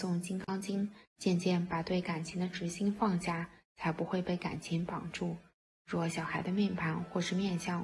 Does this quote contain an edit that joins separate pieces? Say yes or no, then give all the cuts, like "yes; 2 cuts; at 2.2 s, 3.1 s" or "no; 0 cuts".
no; 0 cuts